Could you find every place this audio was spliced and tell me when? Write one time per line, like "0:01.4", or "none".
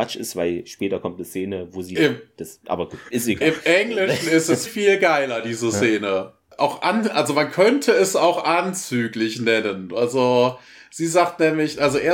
0:04.7